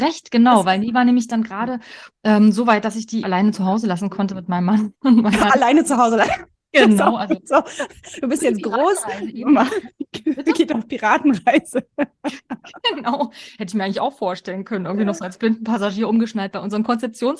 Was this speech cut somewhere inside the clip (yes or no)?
yes